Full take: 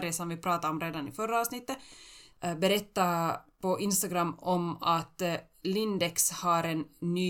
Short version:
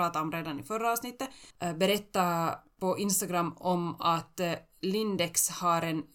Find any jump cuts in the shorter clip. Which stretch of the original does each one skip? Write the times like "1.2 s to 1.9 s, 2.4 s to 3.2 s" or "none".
2.0 s to 2.3 s